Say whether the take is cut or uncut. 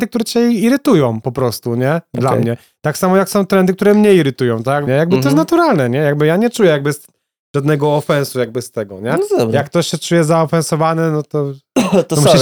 cut